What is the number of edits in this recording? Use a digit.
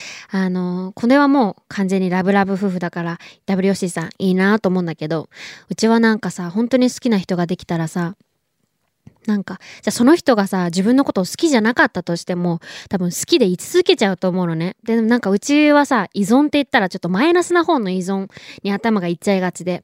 1